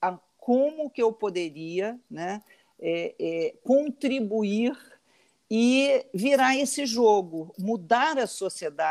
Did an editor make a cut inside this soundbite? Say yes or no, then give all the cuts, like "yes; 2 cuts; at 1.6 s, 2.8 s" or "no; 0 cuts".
yes; 1 cut; at 7.5 s